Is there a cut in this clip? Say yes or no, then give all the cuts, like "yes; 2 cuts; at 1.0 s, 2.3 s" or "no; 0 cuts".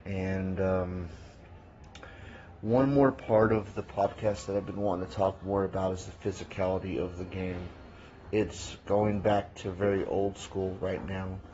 no; 0 cuts